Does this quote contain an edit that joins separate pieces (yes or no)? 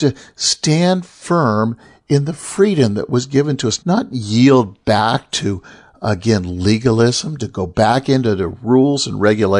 yes